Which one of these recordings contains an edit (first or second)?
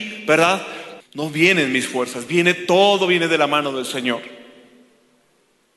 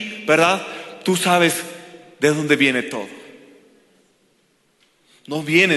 first